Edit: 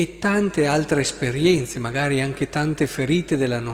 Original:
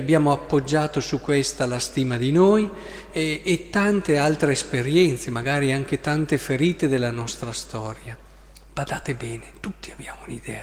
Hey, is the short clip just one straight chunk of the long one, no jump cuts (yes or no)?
yes